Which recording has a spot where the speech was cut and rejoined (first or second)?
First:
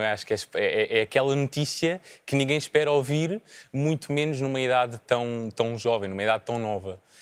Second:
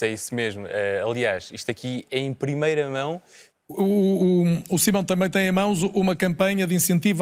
second